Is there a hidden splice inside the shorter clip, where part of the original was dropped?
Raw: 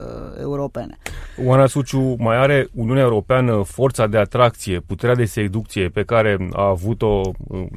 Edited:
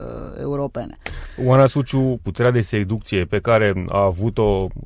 yes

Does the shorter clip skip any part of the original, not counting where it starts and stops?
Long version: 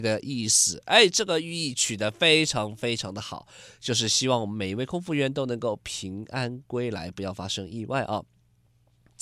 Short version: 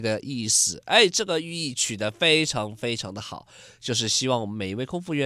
no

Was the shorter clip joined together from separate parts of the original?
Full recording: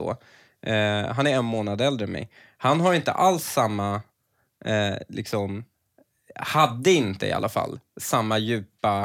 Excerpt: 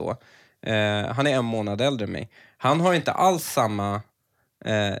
no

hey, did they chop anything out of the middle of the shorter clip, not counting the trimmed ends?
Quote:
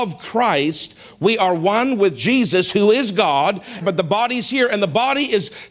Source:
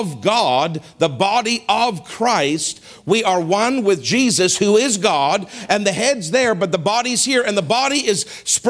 yes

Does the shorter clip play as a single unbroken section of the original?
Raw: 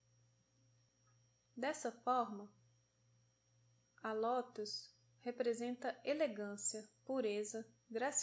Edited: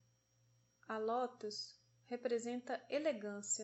yes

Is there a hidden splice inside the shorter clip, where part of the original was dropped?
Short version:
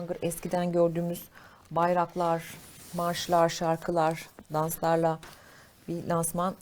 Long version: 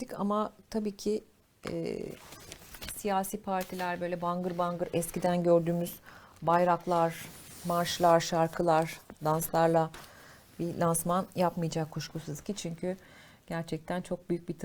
no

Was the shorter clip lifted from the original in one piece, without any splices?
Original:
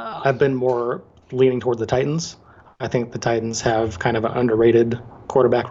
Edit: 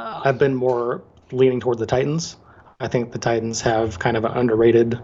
yes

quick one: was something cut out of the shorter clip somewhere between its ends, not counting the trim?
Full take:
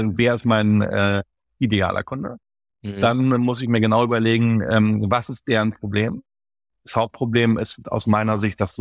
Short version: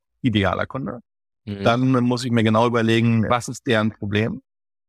yes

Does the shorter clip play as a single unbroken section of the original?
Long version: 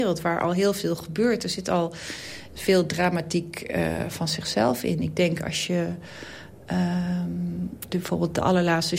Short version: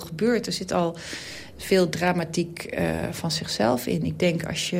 yes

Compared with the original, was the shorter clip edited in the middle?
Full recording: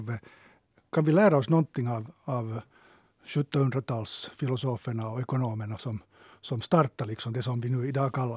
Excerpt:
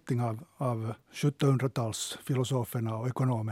yes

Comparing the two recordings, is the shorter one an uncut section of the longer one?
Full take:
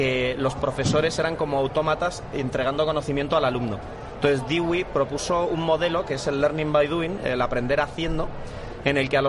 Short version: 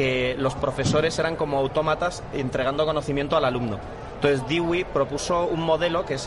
yes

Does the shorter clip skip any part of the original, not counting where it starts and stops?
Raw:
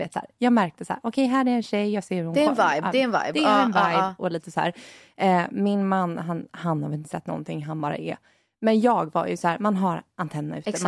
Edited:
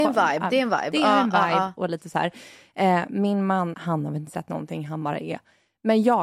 yes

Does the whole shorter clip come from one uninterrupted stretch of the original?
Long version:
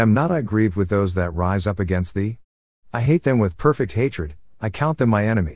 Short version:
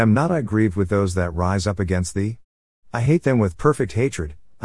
yes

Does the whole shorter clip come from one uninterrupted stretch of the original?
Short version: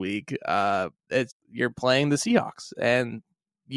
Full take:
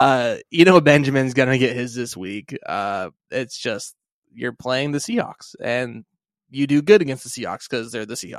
no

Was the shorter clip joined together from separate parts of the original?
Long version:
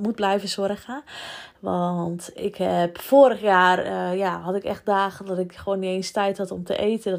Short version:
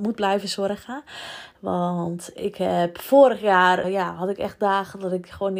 yes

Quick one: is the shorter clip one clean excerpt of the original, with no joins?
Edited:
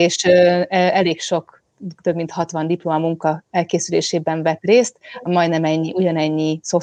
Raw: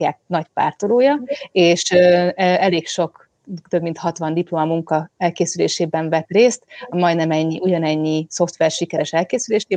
yes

